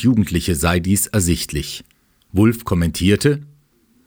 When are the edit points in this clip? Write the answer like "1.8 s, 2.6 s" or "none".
none